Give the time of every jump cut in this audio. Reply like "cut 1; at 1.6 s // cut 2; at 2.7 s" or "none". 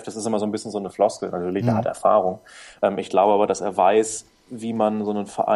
none